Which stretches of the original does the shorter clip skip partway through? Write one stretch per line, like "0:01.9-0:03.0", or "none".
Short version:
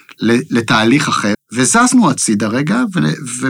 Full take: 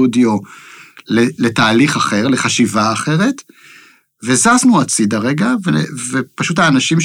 0:02.2-0:04.1